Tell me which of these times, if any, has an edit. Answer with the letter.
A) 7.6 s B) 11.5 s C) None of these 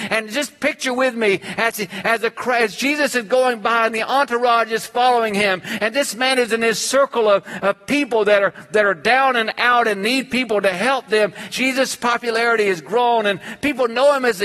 B